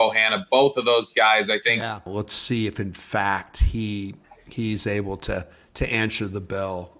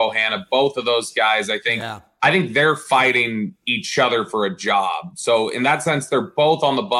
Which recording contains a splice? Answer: first; 1 cut; at 2.1 s

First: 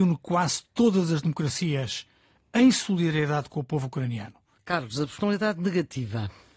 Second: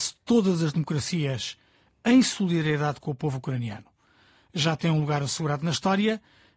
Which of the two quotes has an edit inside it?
first; 1 cut; at 4.6 s

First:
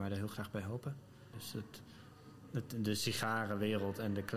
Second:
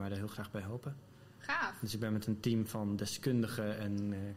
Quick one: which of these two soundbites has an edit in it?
first; 1 cut; at 1.3 s

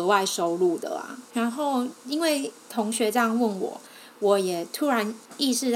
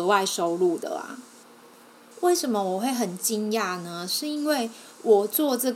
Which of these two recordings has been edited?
first; 1 cut; at 1.2 s

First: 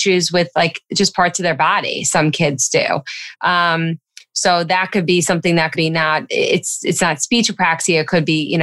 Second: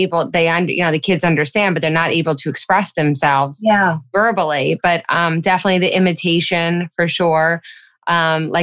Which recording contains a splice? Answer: first; 2 cuts; at 3.3 s, 5.7 s

